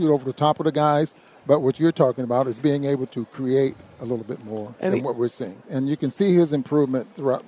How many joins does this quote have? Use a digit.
1